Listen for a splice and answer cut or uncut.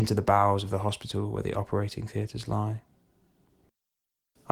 uncut